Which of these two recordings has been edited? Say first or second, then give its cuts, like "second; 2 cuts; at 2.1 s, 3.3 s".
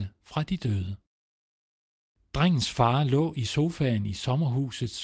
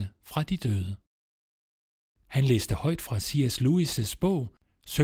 second; 1 cut; at 2.2 s